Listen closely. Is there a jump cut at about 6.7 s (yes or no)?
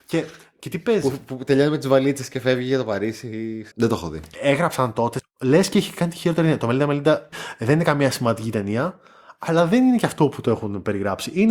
no